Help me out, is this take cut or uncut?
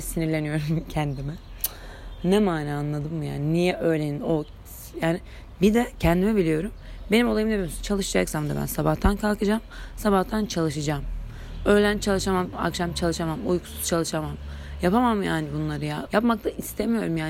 cut